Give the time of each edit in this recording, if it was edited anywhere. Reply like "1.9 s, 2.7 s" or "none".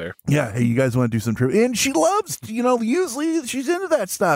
none